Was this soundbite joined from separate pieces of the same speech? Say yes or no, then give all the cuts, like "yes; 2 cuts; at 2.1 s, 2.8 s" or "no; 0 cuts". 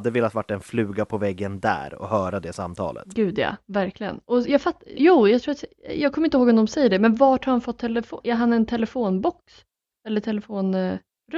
yes; 2 cuts; at 5.0 s, 8.2 s